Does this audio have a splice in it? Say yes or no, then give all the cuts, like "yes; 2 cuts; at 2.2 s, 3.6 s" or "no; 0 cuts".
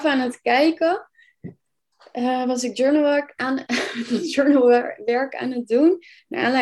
no; 0 cuts